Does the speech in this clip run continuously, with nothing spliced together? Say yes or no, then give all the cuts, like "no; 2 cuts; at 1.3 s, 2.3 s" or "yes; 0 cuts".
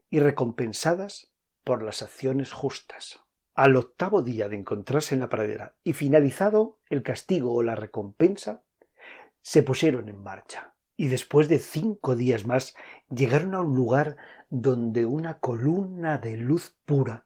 yes; 0 cuts